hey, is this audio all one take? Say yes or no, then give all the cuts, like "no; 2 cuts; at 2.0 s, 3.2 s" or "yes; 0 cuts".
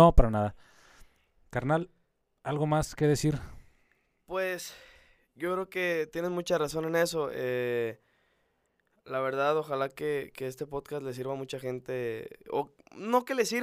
yes; 0 cuts